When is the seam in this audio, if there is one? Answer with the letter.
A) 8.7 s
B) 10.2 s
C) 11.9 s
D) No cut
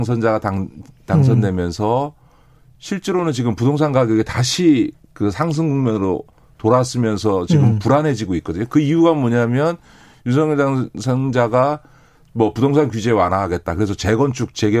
D